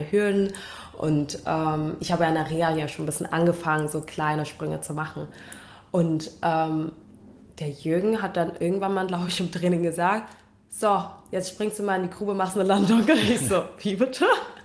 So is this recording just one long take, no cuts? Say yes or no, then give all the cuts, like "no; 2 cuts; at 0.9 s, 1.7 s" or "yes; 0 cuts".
yes; 0 cuts